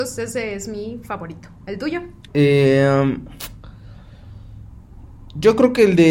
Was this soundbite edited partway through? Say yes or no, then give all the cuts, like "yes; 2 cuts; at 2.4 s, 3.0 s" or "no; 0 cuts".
yes; 1 cut; at 2.3 s